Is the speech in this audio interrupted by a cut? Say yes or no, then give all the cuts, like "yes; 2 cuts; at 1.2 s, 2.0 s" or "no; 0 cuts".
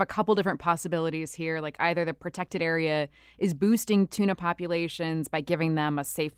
no; 0 cuts